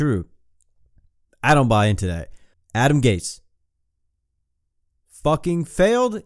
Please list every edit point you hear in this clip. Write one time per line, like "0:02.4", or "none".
0:02.5